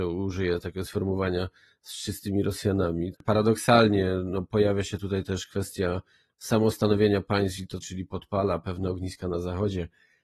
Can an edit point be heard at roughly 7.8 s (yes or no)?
yes